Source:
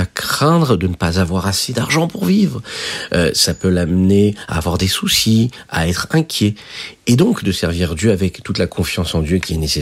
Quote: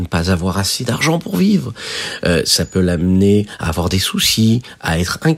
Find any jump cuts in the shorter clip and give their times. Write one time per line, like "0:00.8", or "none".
none